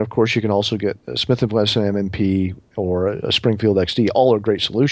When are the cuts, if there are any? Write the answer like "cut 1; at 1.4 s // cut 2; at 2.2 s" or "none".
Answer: none